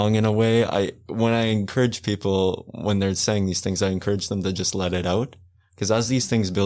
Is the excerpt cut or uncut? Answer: uncut